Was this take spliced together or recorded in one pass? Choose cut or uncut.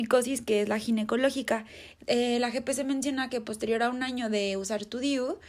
cut